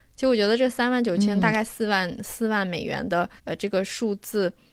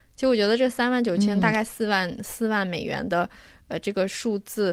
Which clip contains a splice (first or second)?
first